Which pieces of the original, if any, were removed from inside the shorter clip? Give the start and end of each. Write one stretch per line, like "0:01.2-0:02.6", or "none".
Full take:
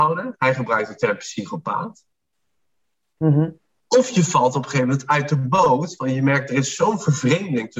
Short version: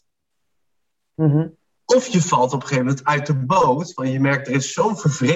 none